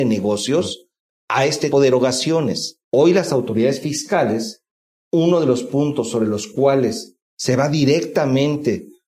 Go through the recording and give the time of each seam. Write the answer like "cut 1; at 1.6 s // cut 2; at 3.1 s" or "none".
cut 1; at 1.7 s // cut 2; at 2.9 s